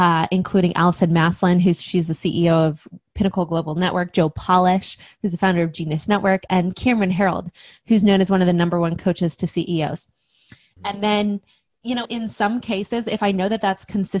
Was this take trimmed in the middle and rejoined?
yes; 2 cuts; at 10.8 s, 12.1 s

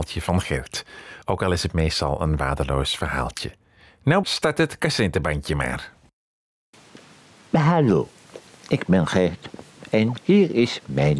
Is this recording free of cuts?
no; 1 cut; at 4.2 s

